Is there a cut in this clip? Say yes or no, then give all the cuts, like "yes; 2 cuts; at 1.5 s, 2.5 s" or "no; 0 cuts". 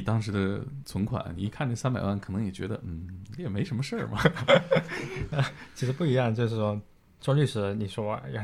no; 0 cuts